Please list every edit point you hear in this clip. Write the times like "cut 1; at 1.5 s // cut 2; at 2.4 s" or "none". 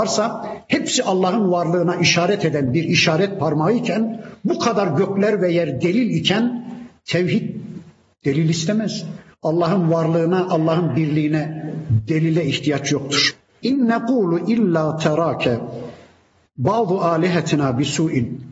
cut 1; at 13.6 s